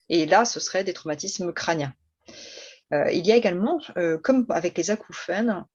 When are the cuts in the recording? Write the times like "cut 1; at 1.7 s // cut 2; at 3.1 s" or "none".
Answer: none